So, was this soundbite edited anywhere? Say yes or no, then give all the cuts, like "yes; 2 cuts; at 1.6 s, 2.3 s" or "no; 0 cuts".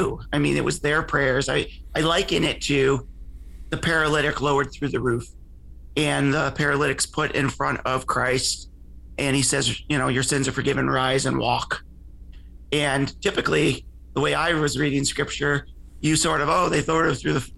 no; 0 cuts